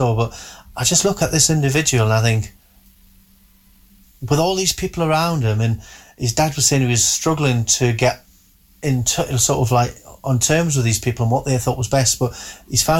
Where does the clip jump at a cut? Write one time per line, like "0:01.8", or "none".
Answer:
none